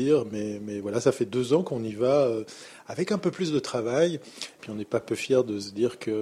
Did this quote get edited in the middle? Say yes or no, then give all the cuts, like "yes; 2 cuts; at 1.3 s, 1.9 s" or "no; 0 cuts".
yes; 1 cut; at 4.6 s